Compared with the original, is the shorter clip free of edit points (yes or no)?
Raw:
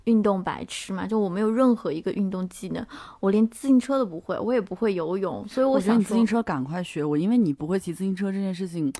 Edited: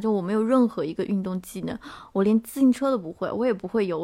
yes